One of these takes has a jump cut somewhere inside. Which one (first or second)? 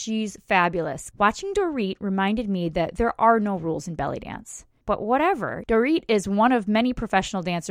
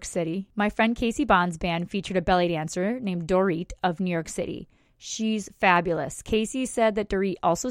first